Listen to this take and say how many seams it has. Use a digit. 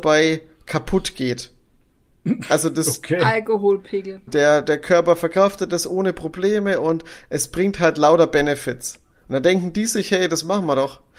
1